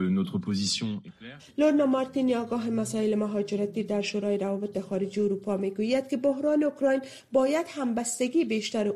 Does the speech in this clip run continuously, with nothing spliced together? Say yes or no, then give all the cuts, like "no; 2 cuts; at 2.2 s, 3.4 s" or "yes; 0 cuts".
no; 1 cut; at 1.4 s